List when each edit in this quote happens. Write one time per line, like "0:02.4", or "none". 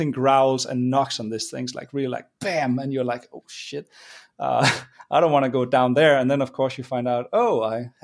none